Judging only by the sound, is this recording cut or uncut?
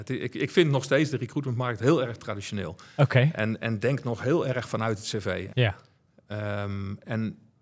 cut